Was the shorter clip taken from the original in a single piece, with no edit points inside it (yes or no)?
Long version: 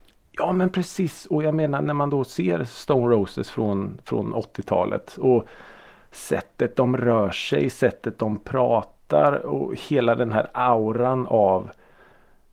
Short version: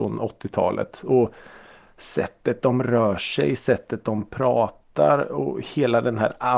yes